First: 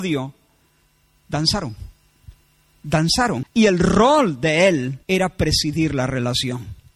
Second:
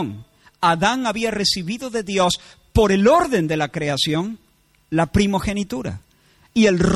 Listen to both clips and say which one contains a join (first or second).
first